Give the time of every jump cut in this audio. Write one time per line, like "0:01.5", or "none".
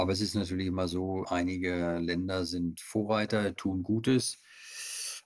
0:01.2